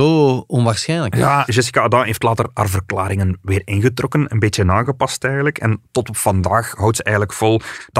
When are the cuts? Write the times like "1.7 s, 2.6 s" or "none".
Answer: 1.5 s

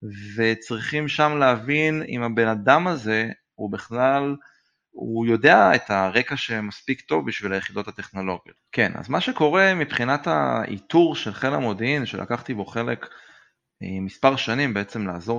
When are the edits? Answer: 8.6 s

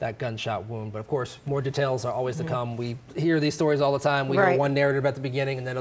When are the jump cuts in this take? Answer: none

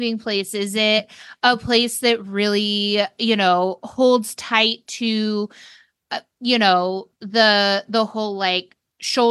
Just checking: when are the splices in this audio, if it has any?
none

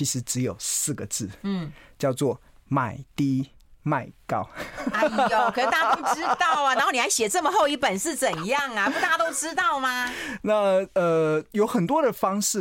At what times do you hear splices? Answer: none

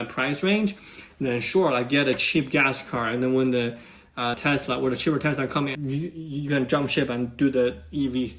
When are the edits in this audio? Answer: 4.3 s, 5.7 s

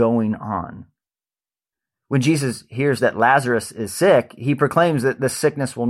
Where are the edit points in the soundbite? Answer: none

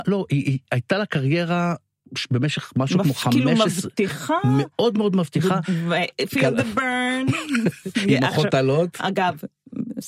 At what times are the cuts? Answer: 5.6 s

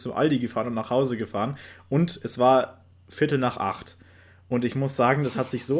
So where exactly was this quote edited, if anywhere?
none

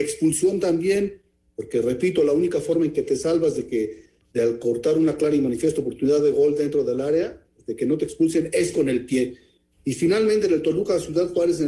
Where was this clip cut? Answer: none

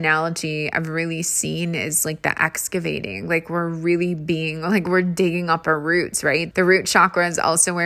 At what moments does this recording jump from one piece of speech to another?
6.5 s

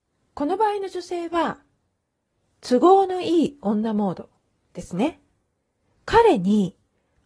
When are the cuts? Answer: none

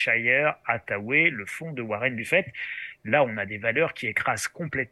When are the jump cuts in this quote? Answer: 3.0 s

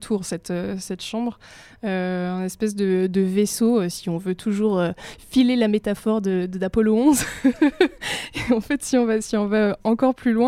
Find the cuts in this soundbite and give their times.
none

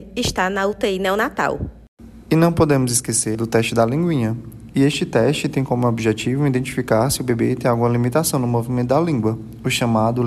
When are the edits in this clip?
3.3 s, 4.7 s

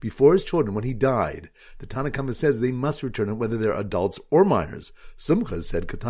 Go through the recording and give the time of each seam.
none

